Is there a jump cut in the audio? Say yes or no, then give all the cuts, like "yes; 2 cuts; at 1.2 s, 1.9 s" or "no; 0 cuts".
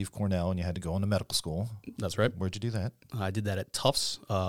no; 0 cuts